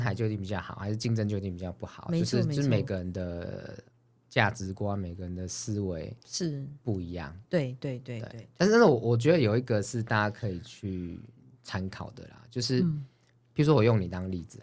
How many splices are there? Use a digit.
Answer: 0